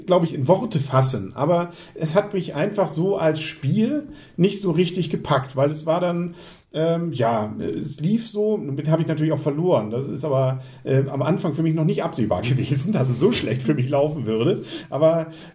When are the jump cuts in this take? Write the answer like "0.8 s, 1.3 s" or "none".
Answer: none